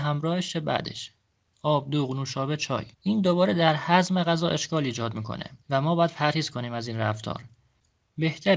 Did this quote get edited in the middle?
yes; 2 cuts; at 2.9 s, 5.6 s

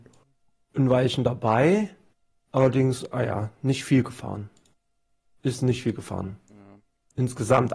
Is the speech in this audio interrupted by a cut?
no; 0 cuts

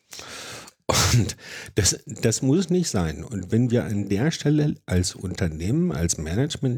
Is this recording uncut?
yes; 0 cuts

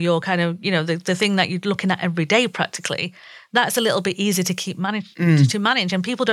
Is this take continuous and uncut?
yes; 0 cuts

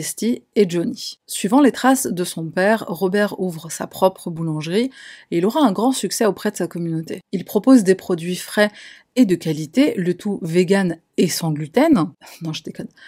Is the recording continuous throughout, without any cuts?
yes; 0 cuts

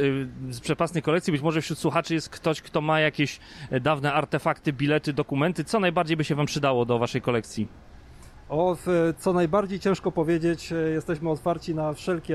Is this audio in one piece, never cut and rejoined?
yes; 0 cuts

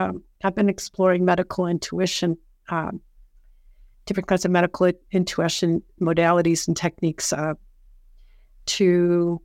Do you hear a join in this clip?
no; 0 cuts

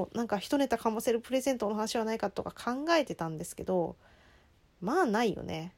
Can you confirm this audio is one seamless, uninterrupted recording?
yes; 0 cuts

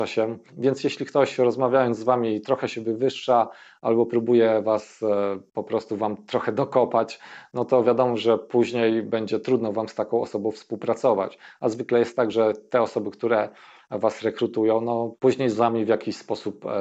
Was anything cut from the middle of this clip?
no; 0 cuts

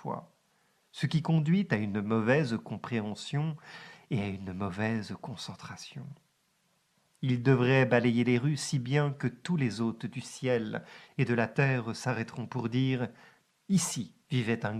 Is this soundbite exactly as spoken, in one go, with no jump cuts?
no; 1 cut; at 7.1 s

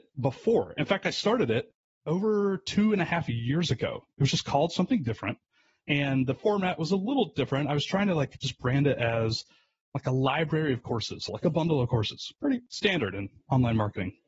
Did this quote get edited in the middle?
no; 0 cuts

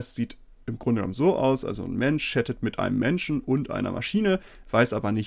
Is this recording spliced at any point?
no; 0 cuts

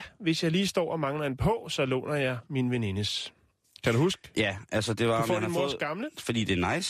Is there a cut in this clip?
no; 0 cuts

